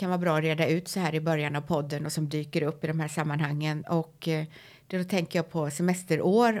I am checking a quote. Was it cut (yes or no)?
no